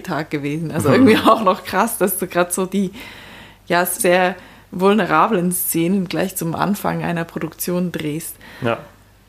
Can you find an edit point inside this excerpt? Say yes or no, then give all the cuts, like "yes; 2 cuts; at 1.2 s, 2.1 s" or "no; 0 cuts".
yes; 1 cut; at 4.0 s